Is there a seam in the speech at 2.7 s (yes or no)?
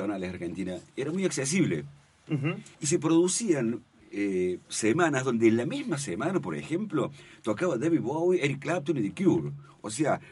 yes